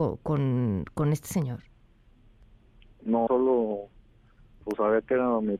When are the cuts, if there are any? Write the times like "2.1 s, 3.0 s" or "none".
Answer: 3.3 s